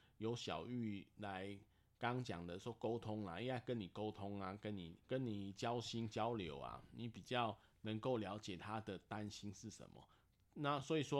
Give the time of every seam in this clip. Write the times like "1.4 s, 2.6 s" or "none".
5.0 s